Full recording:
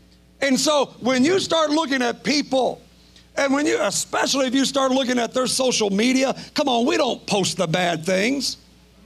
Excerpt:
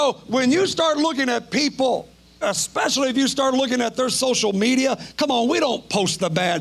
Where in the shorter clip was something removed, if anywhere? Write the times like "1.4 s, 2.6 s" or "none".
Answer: 2.4 s